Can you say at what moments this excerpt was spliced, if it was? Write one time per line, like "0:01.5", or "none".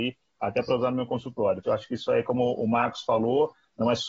0:01.6